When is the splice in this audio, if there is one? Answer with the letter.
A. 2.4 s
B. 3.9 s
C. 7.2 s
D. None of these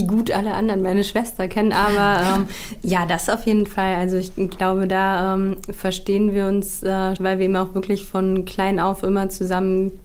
C